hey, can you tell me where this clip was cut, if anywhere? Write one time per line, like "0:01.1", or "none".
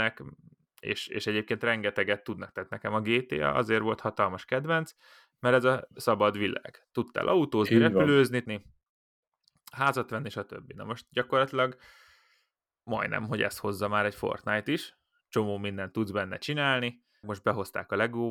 0:08.5
0:17.2